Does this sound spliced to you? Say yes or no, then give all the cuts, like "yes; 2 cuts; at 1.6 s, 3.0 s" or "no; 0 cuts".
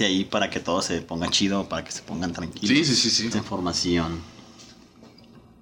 yes; 1 cut; at 3.3 s